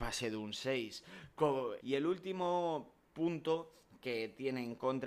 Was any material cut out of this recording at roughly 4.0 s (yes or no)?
no